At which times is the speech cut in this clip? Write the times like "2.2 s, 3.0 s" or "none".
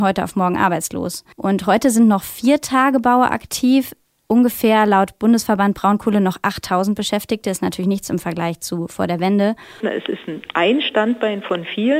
1.3 s, 9.8 s